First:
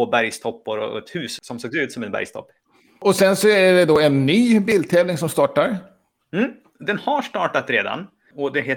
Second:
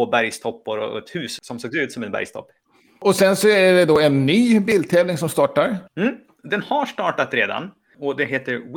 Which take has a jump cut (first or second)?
second